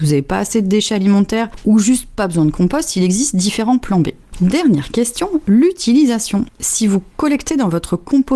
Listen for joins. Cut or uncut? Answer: cut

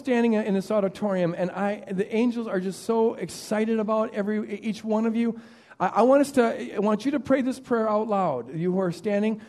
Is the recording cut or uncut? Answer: uncut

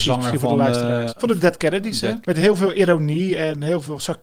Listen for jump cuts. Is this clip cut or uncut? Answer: cut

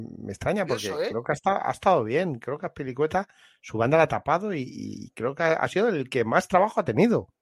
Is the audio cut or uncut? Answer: uncut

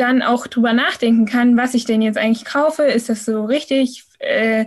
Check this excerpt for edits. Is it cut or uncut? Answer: uncut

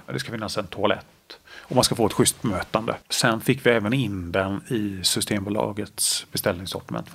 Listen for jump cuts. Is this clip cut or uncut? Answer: cut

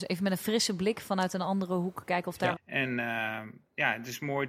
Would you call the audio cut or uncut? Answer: cut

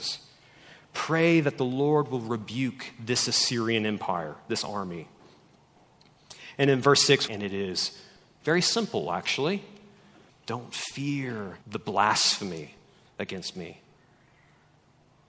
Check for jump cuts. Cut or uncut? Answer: cut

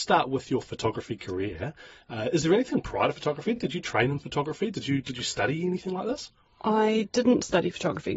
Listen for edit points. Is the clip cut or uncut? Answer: uncut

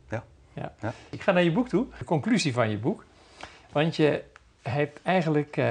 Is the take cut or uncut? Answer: uncut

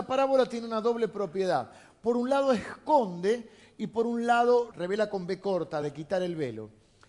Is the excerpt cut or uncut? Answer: cut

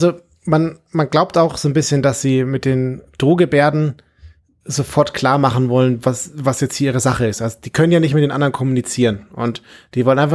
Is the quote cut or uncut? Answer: uncut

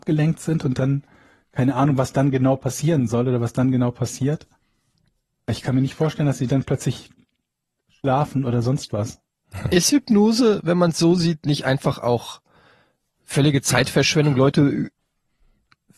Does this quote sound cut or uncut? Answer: uncut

